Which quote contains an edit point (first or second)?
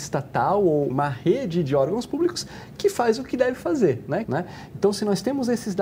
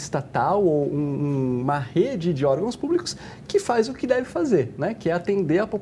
first